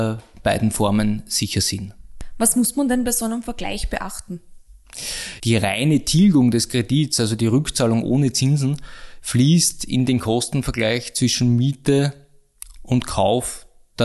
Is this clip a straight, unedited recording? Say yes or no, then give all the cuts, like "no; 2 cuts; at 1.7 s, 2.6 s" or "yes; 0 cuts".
no; 1 cut; at 5.4 s